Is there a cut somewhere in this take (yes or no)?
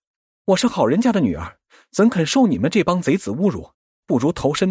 no